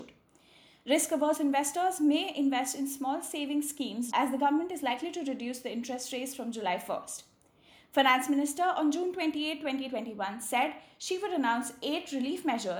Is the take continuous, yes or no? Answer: no